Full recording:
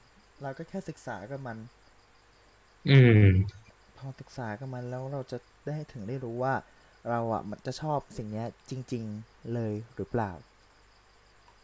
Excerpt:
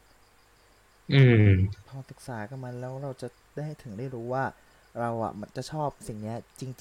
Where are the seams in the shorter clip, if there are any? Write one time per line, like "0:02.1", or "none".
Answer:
0:01.8